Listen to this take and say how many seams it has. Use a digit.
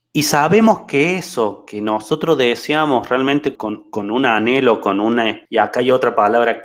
2